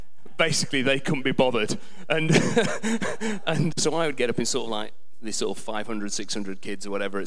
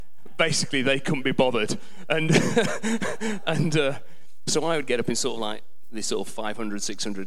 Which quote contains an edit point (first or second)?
first